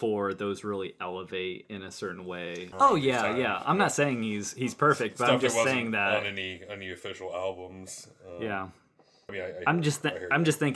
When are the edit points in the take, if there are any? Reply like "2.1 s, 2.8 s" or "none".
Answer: 2.7 s, 9.3 s